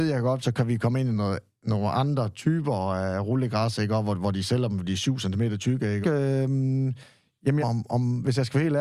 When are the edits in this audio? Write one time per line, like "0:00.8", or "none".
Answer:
0:06.0
0:07.6